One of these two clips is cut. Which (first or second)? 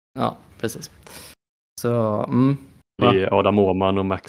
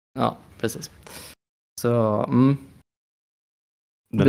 first